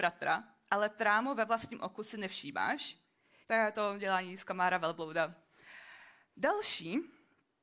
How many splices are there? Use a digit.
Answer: 1